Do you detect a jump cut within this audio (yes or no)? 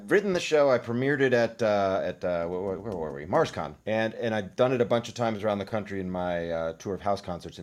yes